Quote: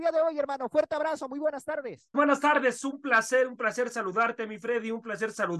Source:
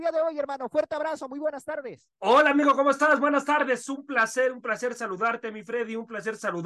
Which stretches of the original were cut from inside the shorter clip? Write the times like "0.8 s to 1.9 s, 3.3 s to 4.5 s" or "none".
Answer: 2.1 s to 3.2 s